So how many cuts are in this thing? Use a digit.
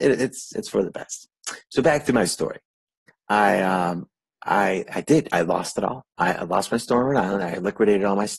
0